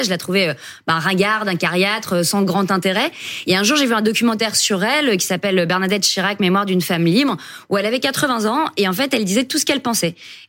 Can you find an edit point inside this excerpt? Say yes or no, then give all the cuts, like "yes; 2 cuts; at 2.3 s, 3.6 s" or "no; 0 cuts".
no; 0 cuts